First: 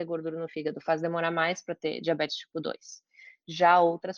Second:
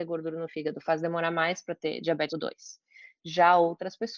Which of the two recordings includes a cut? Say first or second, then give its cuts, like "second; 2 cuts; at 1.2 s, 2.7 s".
second; 1 cut; at 2.3 s